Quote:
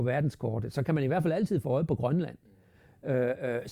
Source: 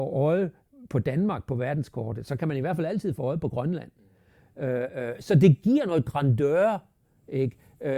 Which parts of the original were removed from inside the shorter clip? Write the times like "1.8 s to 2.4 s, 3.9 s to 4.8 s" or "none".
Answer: none